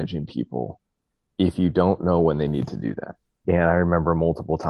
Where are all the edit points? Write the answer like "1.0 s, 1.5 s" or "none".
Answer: 3.4 s

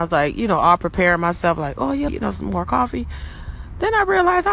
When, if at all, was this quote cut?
2.1 s

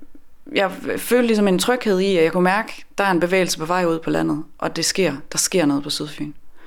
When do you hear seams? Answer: none

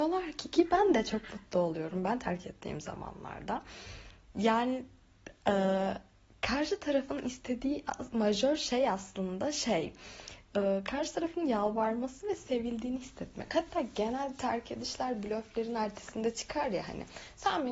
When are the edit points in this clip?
none

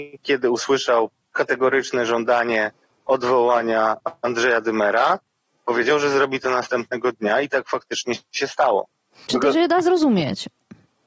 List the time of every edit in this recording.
9.3 s

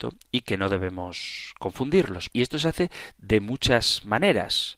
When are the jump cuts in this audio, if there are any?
2.3 s

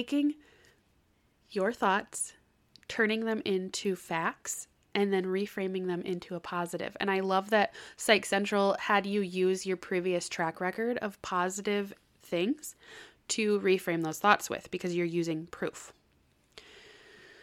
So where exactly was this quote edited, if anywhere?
none

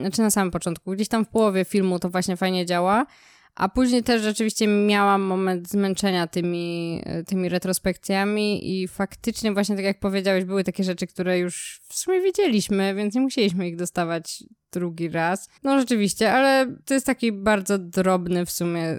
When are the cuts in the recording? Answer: 15.6 s, 16.8 s

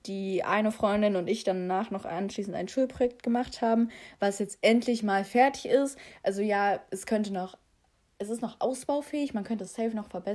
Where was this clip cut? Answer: none

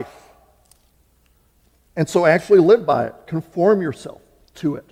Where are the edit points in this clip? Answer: none

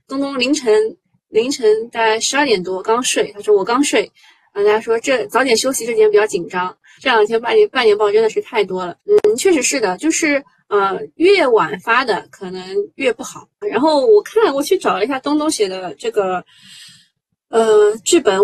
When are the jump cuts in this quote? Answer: 7.0 s, 9.0 s, 13.6 s

